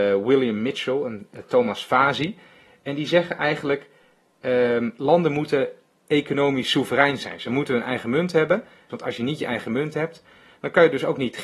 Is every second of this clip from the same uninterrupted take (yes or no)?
no